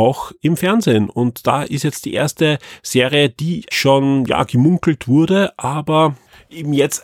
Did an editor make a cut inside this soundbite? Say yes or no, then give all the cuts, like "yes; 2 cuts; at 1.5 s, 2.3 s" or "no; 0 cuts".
yes; 1 cut; at 3.7 s